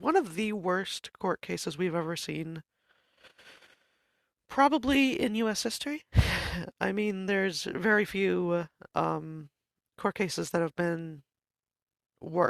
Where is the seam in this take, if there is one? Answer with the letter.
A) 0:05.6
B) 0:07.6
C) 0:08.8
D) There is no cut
D